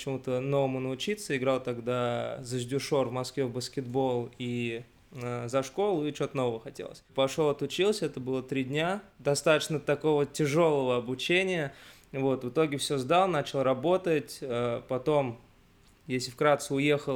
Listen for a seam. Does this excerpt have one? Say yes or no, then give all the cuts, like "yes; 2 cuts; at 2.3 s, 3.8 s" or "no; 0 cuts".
no; 0 cuts